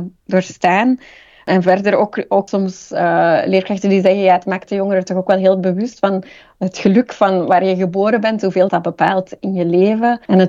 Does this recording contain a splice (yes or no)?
yes